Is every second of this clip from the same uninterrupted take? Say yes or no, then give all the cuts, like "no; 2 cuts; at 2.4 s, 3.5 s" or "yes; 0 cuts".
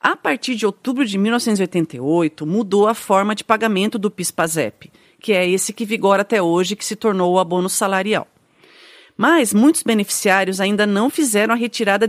yes; 0 cuts